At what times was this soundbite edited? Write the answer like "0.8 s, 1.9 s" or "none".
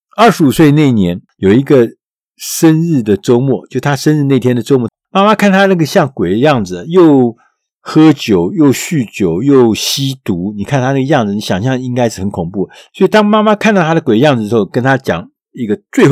4.9 s